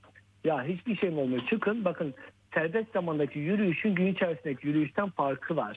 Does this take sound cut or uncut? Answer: uncut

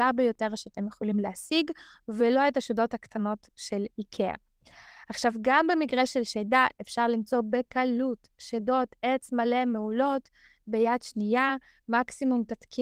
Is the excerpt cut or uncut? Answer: uncut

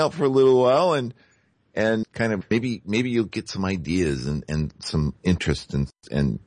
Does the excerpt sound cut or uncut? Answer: cut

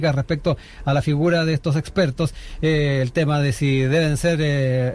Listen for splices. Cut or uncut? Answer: uncut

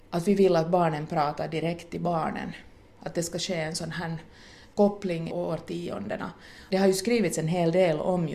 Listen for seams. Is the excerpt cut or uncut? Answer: cut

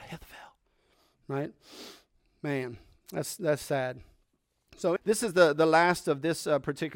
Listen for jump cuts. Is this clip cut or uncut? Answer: cut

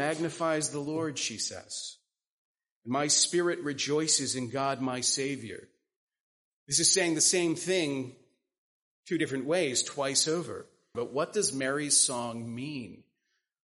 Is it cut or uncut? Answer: cut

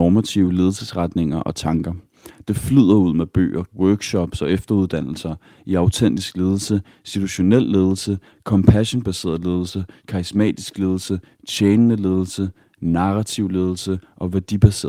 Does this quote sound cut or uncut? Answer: cut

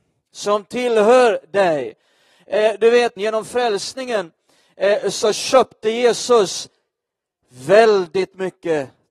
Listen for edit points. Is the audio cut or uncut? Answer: cut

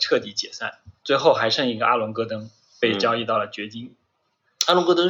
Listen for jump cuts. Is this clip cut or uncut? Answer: uncut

